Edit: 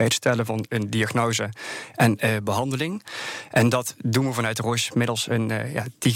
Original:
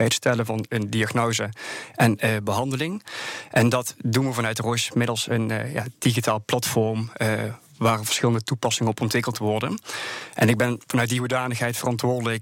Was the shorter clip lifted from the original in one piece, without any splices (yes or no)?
yes